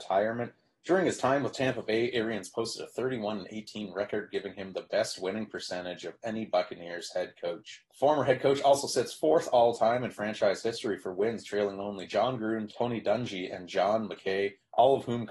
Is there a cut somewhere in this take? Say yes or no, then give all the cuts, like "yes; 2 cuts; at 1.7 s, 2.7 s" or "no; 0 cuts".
no; 0 cuts